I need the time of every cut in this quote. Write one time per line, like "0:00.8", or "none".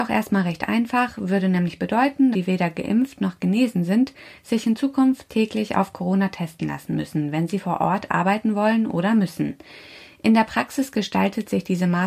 0:02.3